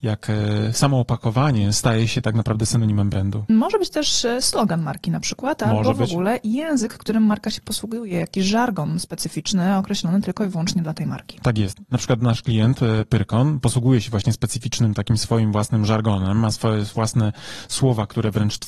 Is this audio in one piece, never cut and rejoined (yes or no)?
no